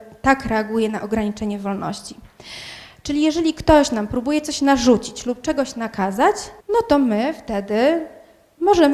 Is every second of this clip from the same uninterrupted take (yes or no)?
no